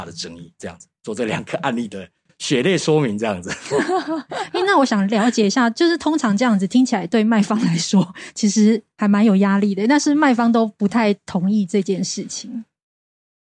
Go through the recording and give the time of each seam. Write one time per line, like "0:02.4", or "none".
none